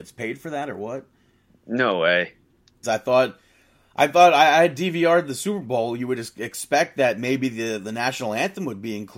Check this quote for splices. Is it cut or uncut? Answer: cut